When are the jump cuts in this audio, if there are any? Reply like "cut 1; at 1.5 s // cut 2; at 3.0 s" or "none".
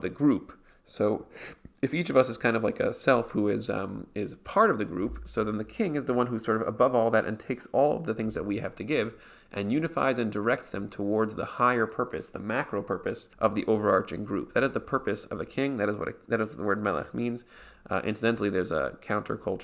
cut 1; at 13.3 s